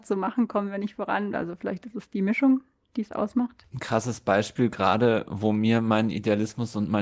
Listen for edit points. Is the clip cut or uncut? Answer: cut